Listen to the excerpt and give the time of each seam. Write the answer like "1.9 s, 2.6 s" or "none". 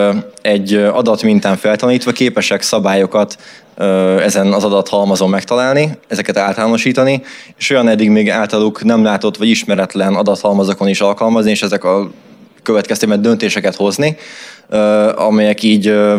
none